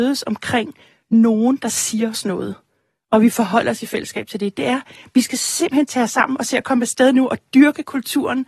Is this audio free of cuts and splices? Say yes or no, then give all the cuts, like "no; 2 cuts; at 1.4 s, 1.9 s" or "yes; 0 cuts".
yes; 0 cuts